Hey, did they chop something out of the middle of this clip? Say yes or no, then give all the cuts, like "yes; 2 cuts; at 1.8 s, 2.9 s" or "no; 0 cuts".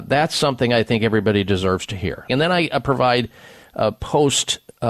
yes; 1 cut; at 2.3 s